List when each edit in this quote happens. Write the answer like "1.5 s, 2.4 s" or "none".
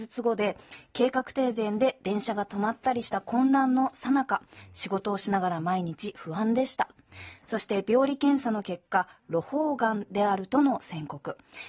none